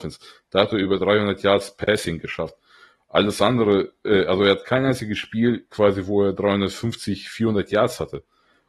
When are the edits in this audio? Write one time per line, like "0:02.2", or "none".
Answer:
none